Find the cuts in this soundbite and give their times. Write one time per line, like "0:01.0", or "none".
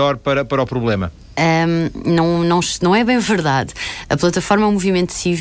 none